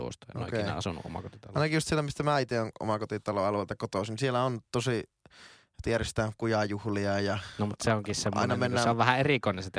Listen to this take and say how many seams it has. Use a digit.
0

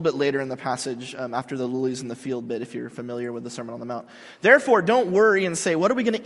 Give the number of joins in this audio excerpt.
0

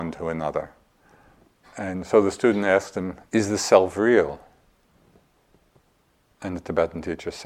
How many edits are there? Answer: 2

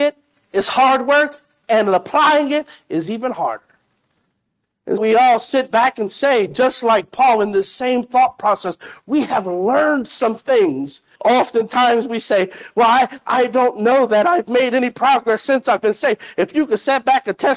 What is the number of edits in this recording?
2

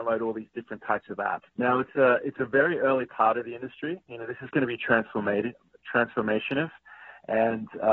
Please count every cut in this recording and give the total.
1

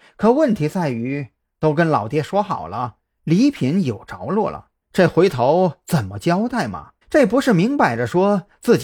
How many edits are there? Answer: 2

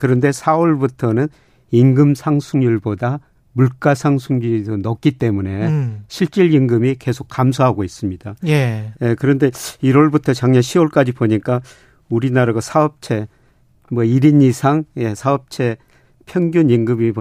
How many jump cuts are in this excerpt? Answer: 1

